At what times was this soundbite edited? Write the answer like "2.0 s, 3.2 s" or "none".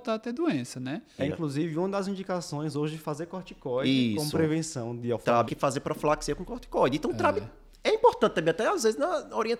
1.2 s, 5.5 s